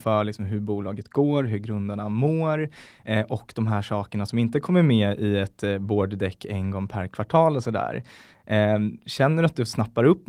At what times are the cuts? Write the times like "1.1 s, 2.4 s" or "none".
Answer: none